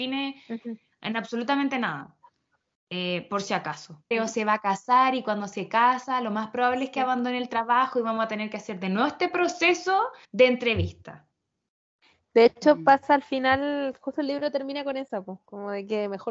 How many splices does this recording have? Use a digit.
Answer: 2